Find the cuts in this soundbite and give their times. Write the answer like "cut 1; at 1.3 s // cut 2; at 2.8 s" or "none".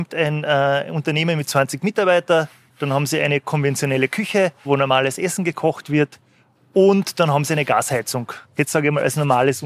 cut 1; at 2.7 s // cut 2; at 4.7 s // cut 3; at 8.4 s